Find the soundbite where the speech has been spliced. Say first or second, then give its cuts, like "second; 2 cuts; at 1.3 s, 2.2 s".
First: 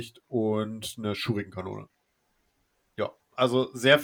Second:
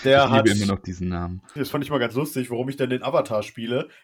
second; 1 cut; at 1.6 s